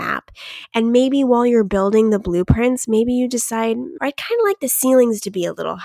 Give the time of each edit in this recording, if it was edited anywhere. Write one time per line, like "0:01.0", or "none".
0:04.0